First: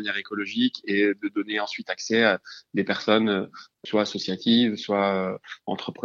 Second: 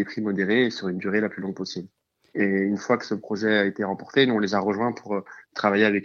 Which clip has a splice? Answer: second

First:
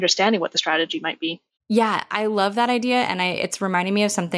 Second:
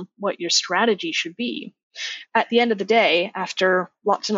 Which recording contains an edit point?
first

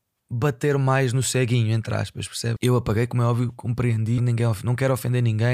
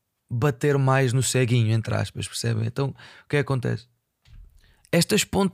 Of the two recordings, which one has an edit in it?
first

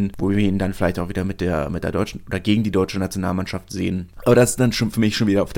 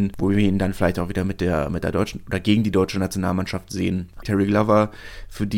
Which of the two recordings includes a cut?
second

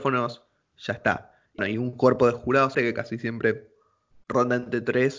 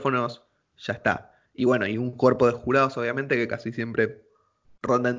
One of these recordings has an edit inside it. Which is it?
first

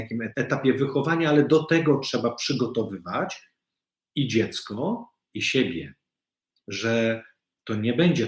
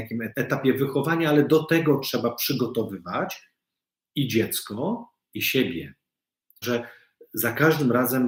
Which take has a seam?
second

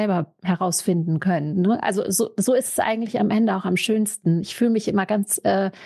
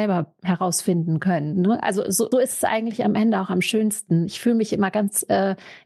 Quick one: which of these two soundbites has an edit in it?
second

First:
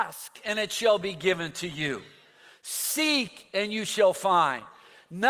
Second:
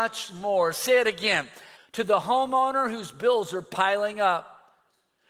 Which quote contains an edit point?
second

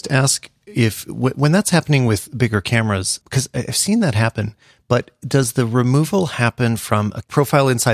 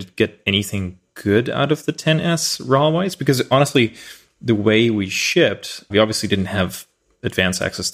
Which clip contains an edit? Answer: second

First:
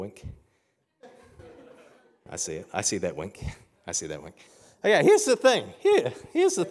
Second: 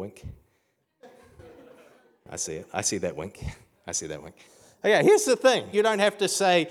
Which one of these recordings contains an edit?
second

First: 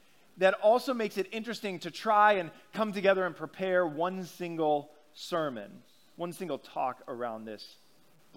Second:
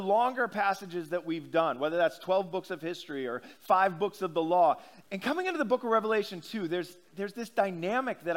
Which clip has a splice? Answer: second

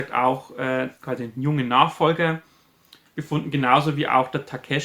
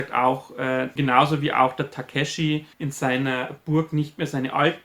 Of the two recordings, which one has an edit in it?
second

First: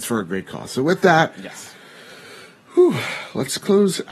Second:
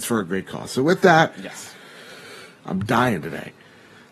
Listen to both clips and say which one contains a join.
second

